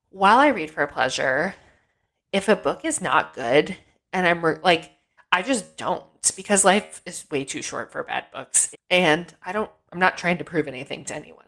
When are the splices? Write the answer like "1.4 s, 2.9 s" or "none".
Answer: 5.2 s, 8.7 s